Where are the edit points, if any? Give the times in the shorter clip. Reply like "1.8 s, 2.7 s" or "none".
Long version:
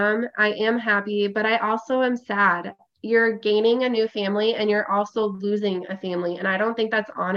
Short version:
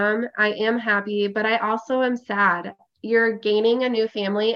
none

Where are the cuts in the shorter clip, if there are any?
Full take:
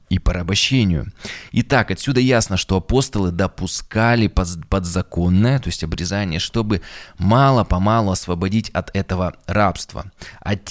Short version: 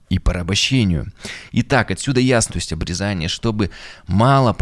2.5 s

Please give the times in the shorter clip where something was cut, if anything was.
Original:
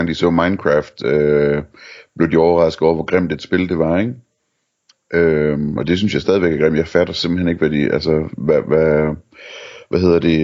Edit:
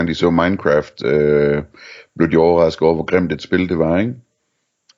none

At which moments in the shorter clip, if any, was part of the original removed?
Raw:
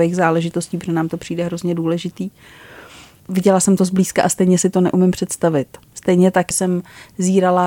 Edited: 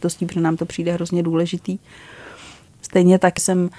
2.7 s

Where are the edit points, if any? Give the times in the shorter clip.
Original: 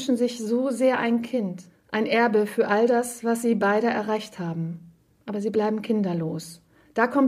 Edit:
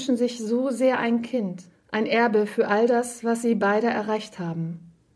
none

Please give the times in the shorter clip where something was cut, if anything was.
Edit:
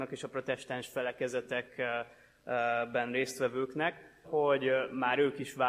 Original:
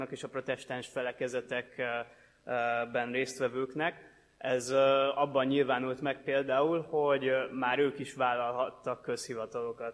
4.2 s

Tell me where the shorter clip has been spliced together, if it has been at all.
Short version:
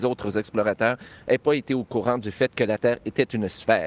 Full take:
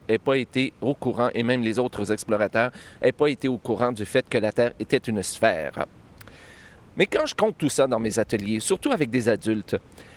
none

